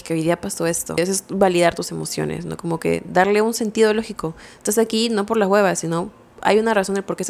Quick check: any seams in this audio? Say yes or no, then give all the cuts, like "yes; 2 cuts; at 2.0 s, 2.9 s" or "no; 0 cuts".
no; 0 cuts